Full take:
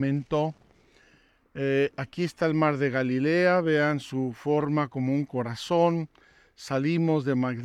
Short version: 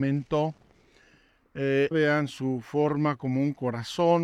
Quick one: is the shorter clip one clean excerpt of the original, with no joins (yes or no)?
no